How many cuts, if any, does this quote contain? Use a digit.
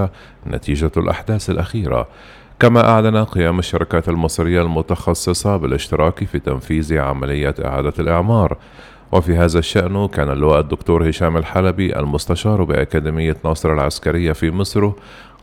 0